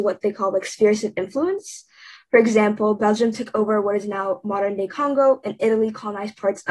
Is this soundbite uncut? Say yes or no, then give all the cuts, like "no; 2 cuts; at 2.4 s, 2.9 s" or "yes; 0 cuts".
yes; 0 cuts